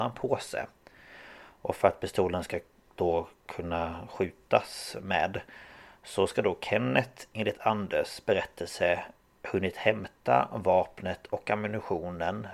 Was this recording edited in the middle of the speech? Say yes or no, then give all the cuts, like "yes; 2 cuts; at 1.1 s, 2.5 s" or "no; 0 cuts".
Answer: no; 0 cuts